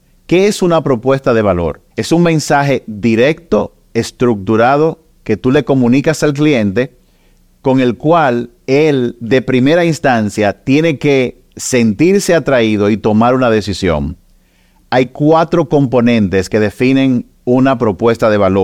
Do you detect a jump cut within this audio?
yes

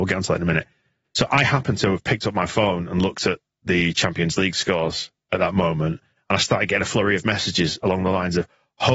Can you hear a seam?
no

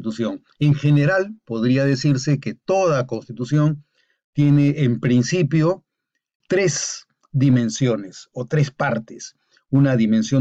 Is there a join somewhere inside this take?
yes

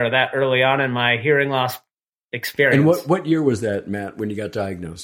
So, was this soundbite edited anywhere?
no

